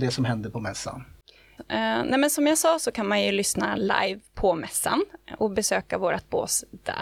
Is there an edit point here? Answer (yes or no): yes